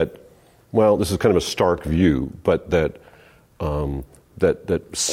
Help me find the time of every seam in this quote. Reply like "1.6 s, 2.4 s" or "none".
none